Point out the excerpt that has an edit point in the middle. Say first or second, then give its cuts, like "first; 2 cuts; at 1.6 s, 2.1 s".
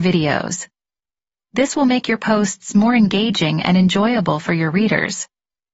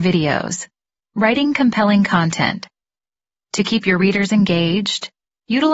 second; 1 cut; at 1.0 s